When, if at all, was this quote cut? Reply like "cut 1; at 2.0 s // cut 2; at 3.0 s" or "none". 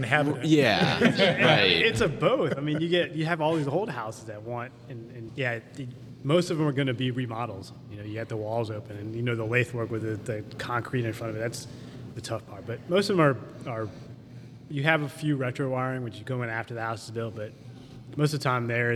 none